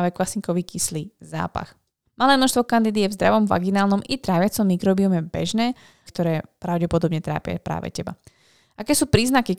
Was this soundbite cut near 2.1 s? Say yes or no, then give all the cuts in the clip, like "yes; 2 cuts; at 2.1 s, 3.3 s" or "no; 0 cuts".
yes; 2 cuts; at 2.1 s, 6.1 s